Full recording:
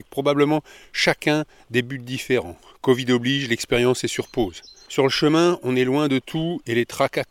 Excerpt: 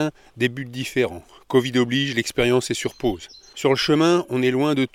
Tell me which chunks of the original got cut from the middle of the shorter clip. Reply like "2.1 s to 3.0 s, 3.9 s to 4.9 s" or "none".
none

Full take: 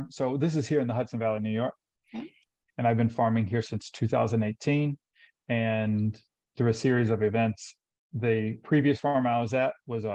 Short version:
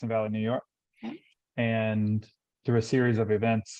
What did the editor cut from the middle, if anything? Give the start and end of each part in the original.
2.5 s to 5.3 s

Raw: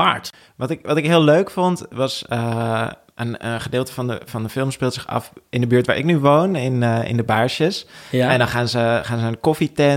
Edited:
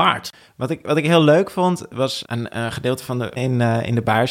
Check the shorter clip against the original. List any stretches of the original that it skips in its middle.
2.2 s to 3.1 s, 4.2 s to 6.6 s

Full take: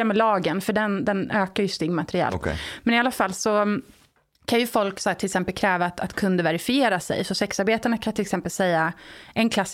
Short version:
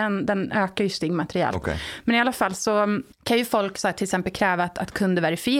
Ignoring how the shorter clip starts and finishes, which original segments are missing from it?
3.9 s to 4.3 s

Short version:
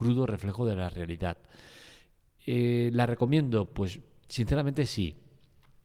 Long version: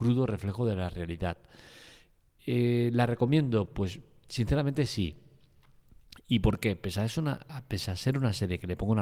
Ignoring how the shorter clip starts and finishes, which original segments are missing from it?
none

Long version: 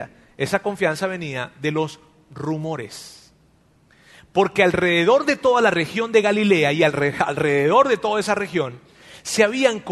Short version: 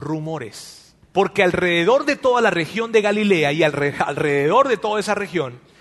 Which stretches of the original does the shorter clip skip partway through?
3.4 s to 4.2 s

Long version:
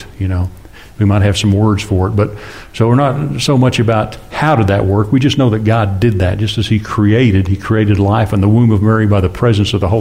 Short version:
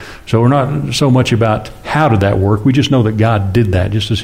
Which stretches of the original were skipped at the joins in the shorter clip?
none

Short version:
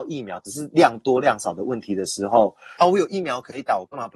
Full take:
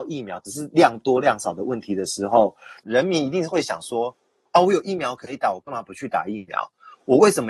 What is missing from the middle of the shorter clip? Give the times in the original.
2.8 s to 4.5 s

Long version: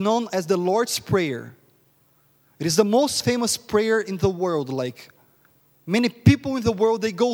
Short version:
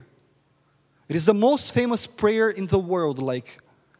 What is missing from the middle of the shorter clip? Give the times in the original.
none

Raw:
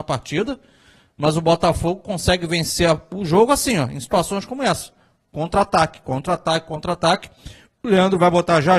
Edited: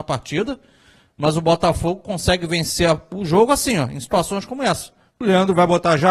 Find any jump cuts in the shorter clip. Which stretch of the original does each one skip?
5.1 s to 7.7 s

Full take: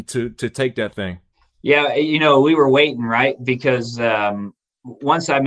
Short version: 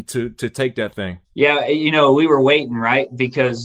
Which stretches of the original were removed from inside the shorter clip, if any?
1.2 s to 1.5 s

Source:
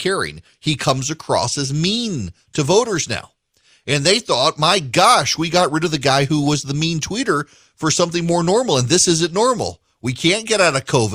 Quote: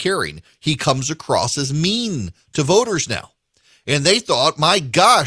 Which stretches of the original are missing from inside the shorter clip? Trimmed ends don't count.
none

